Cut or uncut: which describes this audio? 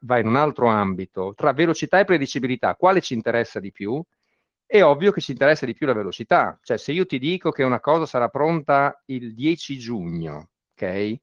cut